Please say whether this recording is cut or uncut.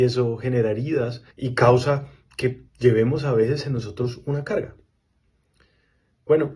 cut